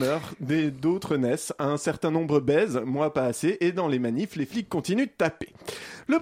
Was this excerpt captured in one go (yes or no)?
yes